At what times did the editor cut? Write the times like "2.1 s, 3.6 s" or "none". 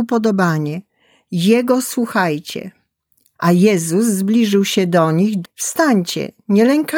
3.3 s, 5.4 s